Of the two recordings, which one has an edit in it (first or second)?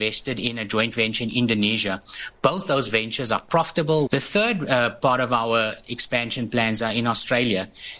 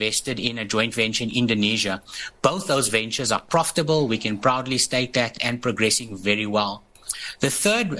first